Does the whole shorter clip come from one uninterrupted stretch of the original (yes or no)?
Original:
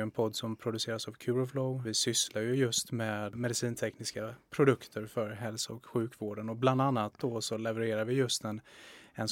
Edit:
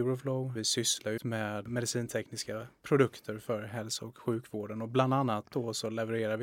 no